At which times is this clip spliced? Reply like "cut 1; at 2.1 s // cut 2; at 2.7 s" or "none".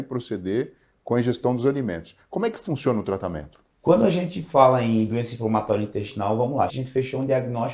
cut 1; at 3.7 s // cut 2; at 6.7 s